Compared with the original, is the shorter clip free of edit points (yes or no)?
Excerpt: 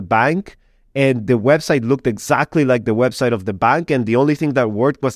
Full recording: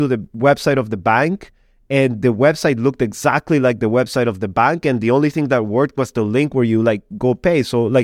yes